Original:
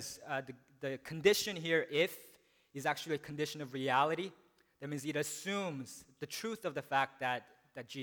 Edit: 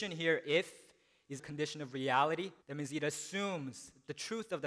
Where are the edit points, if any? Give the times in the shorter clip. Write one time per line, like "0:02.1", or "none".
0:01.4
0:02.6